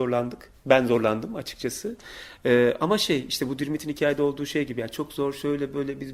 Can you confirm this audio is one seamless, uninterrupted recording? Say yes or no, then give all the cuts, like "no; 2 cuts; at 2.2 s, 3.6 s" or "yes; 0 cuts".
yes; 0 cuts